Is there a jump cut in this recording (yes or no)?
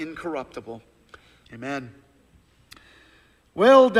yes